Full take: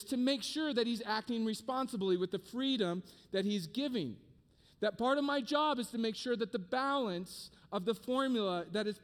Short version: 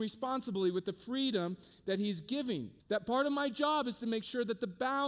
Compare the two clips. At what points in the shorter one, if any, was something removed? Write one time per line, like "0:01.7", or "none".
0:02.8